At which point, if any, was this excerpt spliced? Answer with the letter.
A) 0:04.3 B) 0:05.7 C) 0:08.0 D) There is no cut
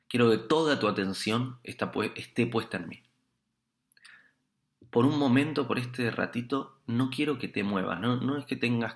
D